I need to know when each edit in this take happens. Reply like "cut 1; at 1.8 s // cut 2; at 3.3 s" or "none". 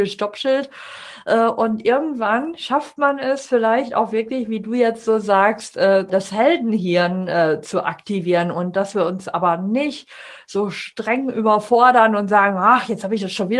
cut 1; at 6.1 s

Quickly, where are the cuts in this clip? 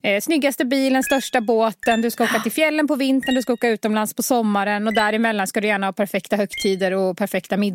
none

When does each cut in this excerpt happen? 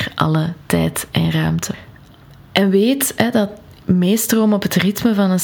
none

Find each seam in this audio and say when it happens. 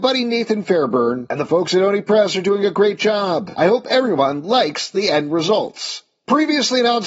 none

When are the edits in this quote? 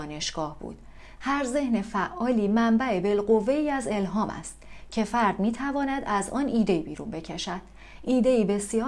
cut 1; at 1.2 s

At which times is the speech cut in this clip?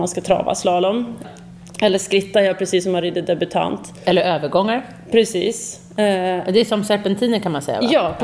cut 1; at 1.2 s

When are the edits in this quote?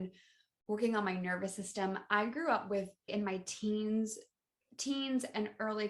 cut 1; at 3.1 s

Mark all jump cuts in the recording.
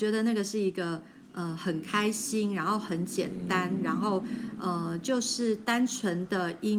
none

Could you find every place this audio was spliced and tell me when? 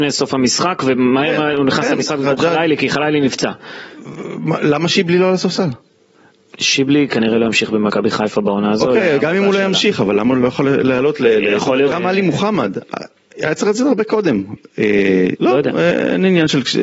cut 1; at 11.9 s // cut 2; at 15.4 s

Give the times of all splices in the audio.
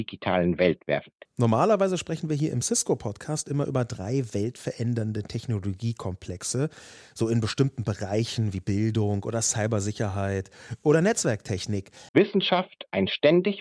cut 1; at 1.3 s // cut 2; at 12.1 s

